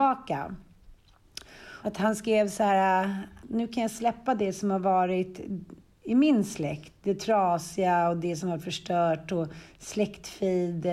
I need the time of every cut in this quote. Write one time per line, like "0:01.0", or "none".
0:01.8
0:03.4

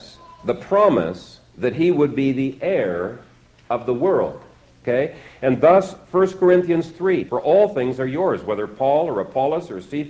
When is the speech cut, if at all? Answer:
0:04.6
0:07.3

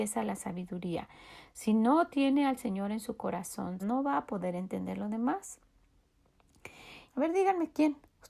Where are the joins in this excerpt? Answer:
0:03.8
0:07.1

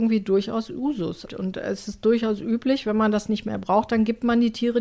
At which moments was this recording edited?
0:01.3

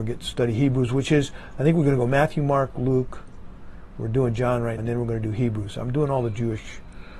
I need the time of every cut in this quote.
0:04.8

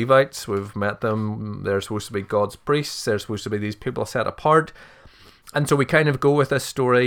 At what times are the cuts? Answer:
none

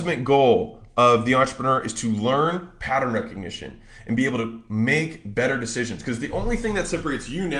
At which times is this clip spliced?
none

